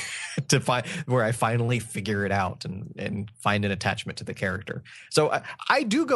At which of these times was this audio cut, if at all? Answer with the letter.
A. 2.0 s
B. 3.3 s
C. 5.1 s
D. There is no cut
B